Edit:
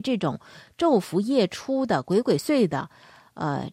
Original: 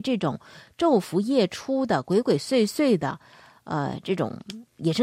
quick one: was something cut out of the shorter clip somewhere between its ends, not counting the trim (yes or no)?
yes